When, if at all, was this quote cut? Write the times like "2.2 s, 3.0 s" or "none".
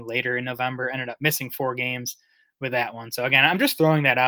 none